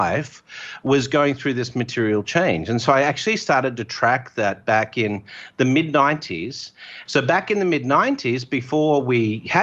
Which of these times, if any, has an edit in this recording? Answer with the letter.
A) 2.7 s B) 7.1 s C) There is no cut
B